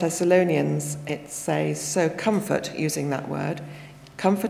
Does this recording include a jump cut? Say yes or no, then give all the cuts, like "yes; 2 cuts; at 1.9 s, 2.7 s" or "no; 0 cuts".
no; 0 cuts